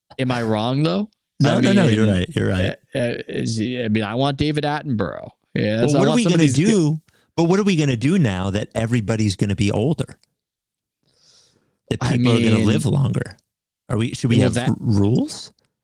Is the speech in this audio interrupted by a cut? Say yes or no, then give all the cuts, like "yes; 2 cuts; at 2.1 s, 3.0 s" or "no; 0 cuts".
no; 0 cuts